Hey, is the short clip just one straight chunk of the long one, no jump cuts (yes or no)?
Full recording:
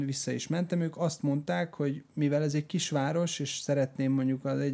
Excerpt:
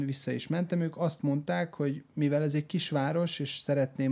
yes